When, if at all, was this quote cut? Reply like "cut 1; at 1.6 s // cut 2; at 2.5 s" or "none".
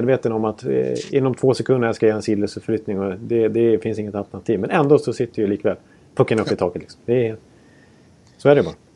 none